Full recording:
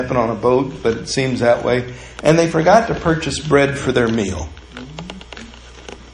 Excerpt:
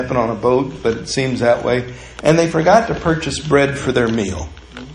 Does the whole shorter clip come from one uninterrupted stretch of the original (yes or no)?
yes